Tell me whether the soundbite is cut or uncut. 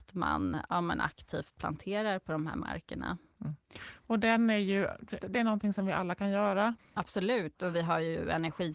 cut